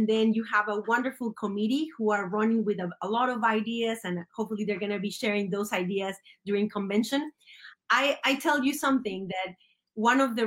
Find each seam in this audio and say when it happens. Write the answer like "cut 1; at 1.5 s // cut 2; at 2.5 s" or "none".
none